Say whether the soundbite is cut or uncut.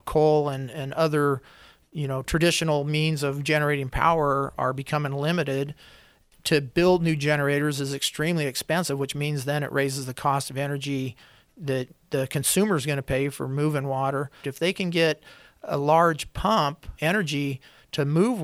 cut